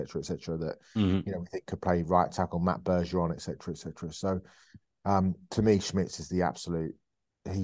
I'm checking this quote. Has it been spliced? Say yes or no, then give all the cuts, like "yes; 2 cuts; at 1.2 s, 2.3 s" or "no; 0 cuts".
no; 0 cuts